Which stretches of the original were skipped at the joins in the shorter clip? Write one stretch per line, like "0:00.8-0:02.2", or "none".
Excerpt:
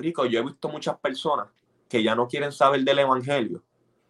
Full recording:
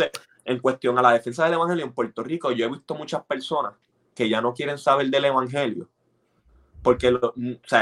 none